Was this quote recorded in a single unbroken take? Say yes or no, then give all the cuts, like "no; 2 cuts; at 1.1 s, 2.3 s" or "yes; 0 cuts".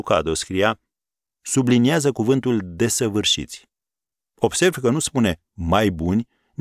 yes; 0 cuts